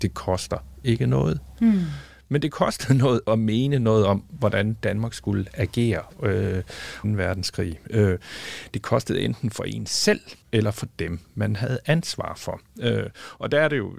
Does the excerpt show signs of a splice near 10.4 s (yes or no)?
yes